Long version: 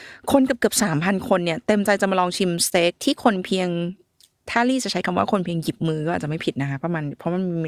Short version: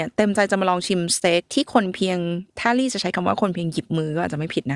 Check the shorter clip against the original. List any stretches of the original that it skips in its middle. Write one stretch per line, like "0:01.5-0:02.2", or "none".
0:04.0-0:04.4